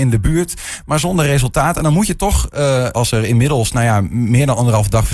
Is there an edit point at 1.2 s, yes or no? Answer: no